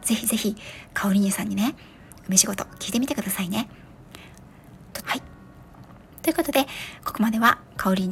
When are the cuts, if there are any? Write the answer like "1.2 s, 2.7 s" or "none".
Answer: 5.0 s